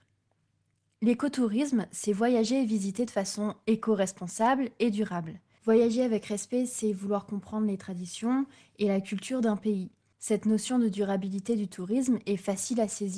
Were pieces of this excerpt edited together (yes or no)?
yes